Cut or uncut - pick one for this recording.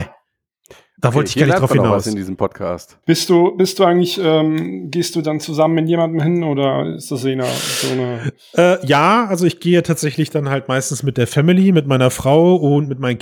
cut